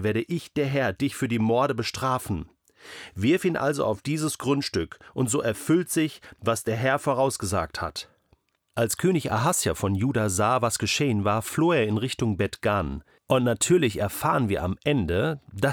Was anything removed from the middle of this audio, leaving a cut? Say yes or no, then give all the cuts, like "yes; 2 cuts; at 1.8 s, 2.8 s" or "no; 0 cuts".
yes; 1 cut; at 13.2 s